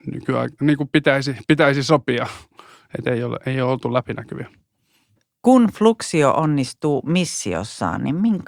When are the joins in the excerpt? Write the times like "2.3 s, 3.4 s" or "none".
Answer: none